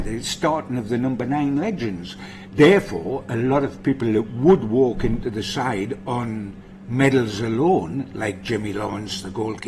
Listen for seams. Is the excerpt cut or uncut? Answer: cut